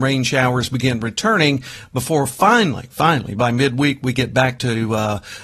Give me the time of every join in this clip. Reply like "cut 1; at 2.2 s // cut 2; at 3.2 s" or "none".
none